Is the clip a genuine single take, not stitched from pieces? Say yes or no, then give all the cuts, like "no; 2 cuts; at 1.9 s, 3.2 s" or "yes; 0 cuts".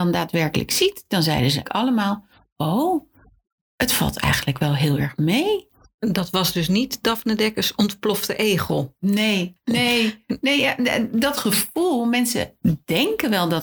yes; 0 cuts